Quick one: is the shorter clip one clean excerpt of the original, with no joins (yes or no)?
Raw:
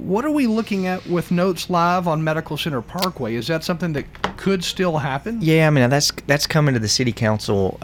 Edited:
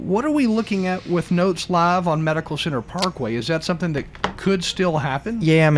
yes